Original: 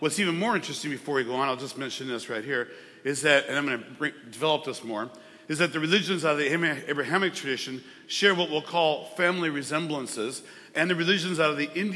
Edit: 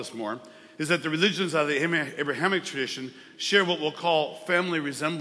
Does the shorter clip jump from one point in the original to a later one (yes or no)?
no